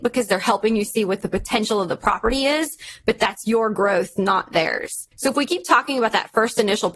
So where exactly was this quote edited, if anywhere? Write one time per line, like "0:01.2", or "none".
0:05.1